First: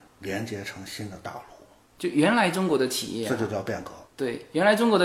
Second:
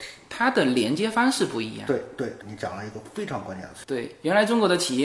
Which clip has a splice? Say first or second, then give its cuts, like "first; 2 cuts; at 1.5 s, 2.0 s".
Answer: second; 2 cuts; at 2.4 s, 3.8 s